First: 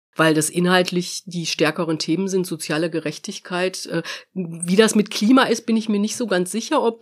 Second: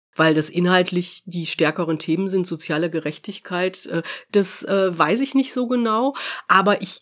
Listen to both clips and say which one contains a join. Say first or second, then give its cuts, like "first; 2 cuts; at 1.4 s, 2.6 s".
second; 1 cut; at 4.3 s